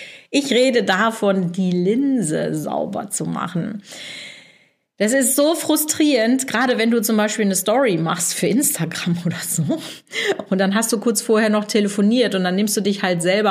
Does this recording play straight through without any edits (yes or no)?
yes